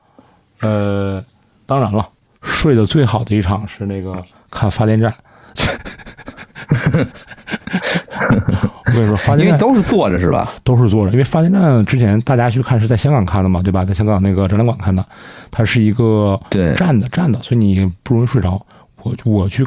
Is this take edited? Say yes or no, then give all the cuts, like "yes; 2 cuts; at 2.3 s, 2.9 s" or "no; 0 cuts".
no; 0 cuts